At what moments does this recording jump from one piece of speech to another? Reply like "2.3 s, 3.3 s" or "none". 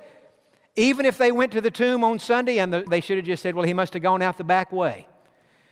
2.9 s